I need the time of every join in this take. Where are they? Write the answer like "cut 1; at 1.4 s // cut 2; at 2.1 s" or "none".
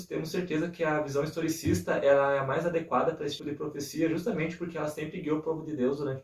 cut 1; at 3.4 s